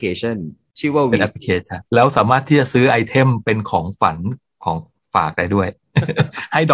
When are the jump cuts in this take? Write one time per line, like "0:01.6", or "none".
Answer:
0:01.9